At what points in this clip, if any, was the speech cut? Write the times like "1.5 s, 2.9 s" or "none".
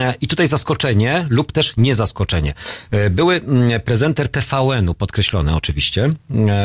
none